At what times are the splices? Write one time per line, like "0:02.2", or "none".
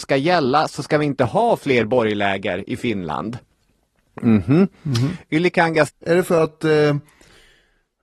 0:05.9